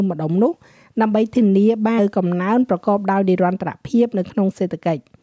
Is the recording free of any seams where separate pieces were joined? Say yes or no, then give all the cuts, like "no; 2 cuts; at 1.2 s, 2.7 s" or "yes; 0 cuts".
no; 1 cut; at 2.0 s